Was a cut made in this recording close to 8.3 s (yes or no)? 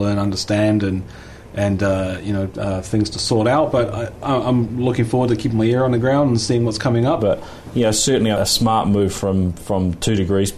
yes